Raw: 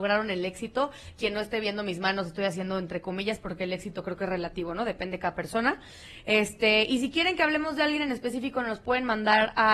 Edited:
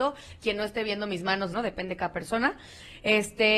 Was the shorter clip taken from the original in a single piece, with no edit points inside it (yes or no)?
no